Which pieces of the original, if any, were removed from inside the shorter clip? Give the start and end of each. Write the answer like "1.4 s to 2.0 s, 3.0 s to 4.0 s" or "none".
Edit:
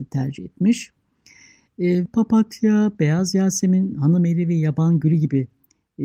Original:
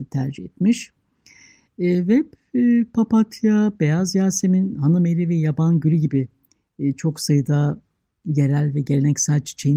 2.1 s to 2.9 s